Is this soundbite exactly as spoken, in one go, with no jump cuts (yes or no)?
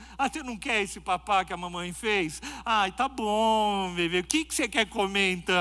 yes